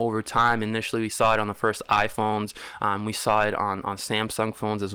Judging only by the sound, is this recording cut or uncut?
uncut